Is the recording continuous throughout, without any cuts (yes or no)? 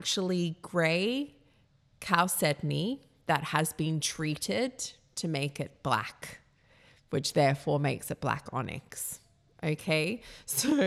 yes